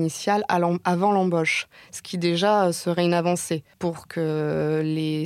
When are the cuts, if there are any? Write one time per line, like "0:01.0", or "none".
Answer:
0:03.7